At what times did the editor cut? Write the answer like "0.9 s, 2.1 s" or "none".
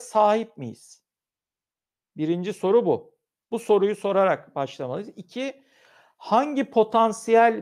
none